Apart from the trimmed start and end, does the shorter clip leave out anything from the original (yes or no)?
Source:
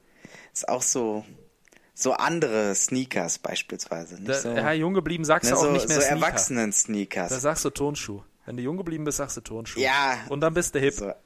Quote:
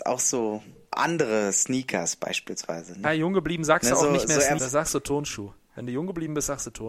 yes